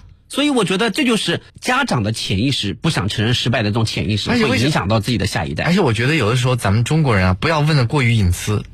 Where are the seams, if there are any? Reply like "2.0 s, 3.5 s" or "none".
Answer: 1.5 s